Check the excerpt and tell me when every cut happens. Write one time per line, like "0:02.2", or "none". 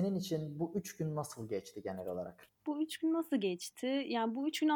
0:02.5